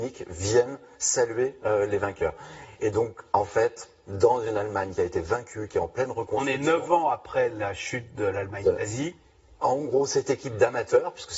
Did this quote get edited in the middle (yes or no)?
no